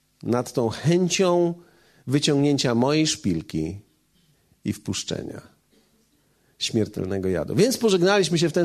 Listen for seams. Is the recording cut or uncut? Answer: uncut